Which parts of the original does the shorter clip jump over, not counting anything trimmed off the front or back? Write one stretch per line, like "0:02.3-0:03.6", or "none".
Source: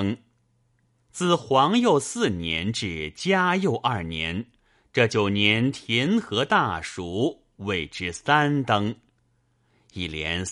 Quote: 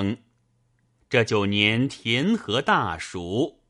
0:01.0-0:04.8